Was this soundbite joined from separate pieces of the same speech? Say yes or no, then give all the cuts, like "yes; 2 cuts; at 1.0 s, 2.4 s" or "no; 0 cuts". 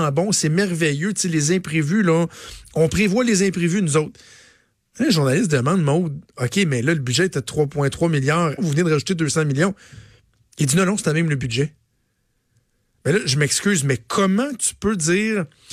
yes; 1 cut; at 8.6 s